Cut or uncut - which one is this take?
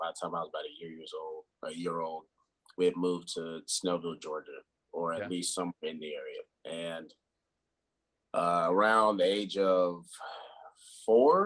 uncut